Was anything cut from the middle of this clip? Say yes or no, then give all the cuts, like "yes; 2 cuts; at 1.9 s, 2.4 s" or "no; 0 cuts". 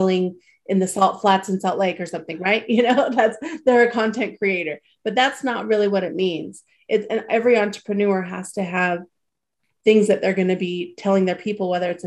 no; 0 cuts